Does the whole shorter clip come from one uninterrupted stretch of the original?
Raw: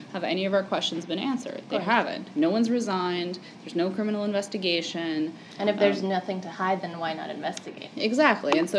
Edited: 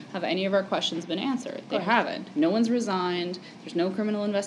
yes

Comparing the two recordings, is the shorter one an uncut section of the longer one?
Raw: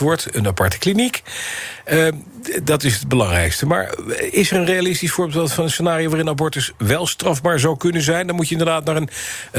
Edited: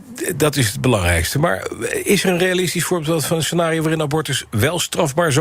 yes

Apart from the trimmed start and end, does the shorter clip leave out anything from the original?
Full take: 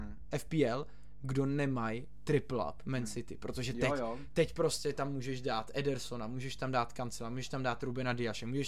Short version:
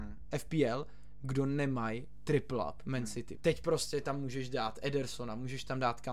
yes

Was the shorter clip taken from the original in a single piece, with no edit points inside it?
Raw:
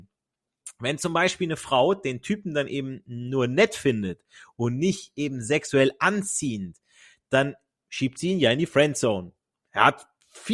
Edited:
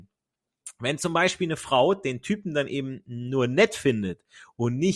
yes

